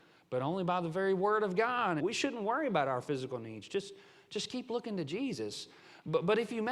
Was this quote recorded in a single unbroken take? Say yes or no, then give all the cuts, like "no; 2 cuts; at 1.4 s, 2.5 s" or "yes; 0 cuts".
no; 1 cut; at 2.0 s